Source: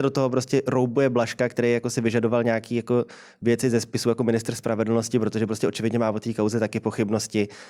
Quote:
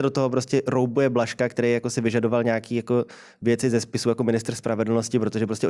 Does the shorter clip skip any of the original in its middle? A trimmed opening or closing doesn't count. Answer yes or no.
no